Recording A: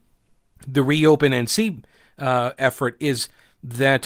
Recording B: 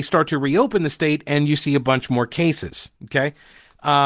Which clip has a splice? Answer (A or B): B